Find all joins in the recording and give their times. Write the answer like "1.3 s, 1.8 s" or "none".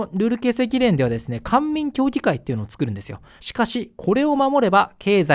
3.4 s